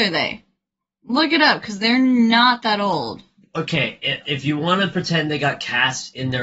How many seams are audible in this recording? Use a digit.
1